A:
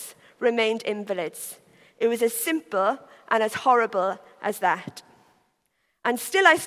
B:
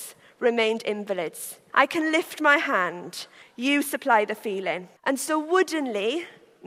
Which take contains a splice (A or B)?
B